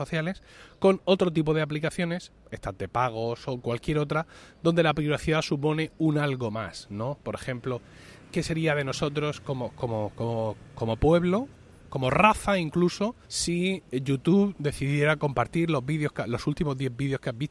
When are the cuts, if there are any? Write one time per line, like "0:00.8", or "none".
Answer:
0:13.2